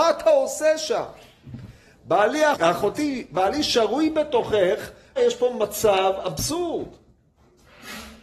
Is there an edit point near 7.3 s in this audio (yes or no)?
no